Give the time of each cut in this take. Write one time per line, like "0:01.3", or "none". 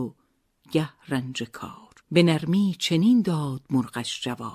0:02.0